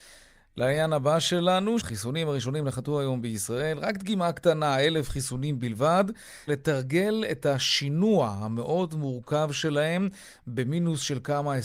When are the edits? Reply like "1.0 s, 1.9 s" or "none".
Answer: 1.8 s, 6.5 s